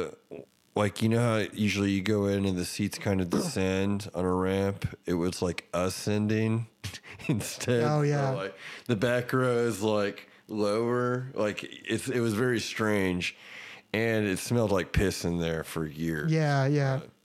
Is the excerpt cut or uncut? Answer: uncut